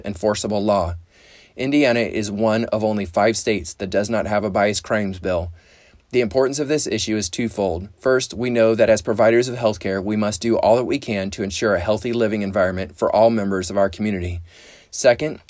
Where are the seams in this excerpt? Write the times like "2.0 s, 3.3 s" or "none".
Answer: 7.9 s